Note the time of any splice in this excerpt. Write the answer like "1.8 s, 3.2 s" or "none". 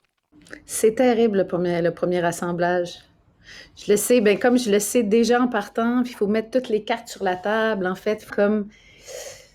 8.3 s